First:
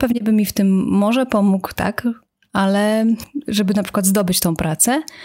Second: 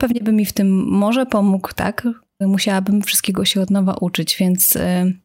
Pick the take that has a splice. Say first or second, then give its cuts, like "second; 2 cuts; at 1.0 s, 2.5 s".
second; 1 cut; at 2.4 s